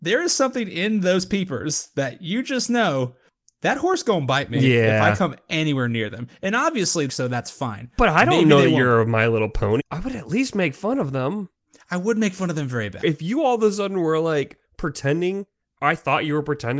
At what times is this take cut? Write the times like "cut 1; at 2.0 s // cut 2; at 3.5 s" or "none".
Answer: cut 1; at 7.1 s // cut 2; at 9.8 s // cut 3; at 13.0 s